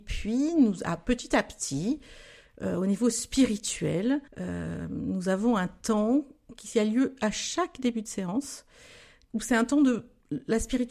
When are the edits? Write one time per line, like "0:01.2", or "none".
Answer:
0:04.3
0:09.3